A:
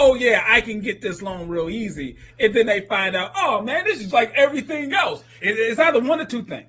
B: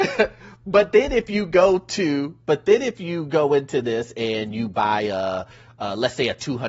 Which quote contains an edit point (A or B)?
A